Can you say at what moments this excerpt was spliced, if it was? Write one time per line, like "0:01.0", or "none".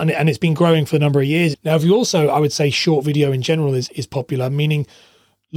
0:01.5